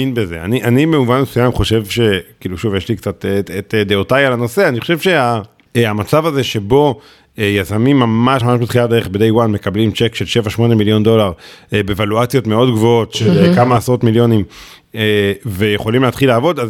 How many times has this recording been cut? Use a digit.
1